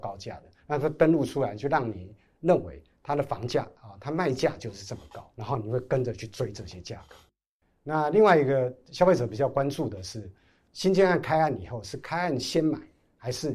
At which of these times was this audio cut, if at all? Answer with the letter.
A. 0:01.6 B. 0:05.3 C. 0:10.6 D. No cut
B